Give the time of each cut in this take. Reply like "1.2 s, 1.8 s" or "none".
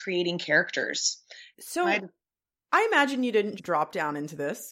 1.5 s, 3.6 s